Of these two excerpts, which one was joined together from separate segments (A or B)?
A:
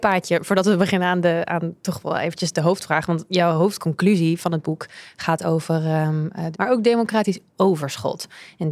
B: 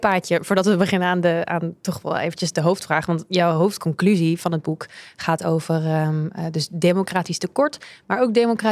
A